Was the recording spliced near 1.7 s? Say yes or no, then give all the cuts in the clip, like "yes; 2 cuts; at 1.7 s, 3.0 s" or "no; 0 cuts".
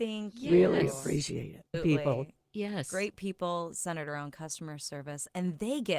yes; 1 cut; at 1.7 s